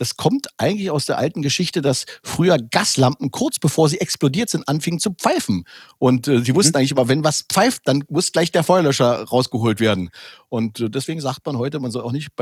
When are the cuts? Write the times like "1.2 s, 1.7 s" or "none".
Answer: none